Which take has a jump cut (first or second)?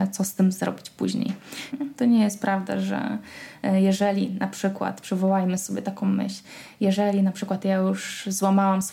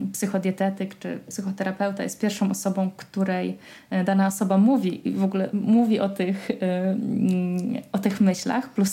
first